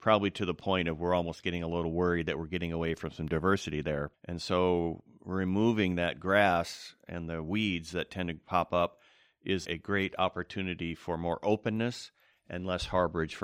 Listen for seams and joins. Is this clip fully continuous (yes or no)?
no